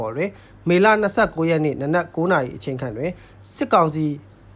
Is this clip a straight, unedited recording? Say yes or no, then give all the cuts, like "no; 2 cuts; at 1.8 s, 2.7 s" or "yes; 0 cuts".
yes; 0 cuts